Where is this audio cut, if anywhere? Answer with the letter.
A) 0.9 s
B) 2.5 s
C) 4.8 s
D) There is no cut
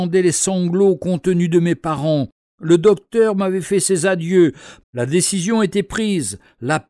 C